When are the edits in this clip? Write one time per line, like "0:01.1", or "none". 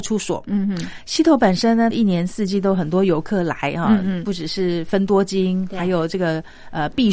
0:01.9